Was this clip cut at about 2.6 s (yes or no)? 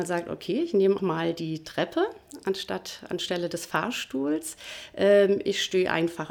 no